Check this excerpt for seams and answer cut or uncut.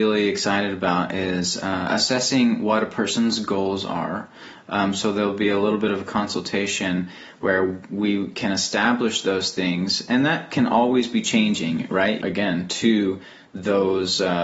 cut